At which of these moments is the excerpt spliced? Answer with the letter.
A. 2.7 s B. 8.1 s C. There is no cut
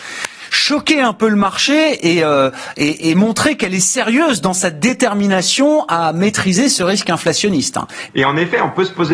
B